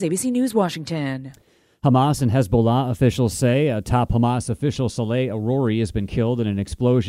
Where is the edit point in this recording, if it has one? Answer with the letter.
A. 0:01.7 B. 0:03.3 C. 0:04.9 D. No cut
D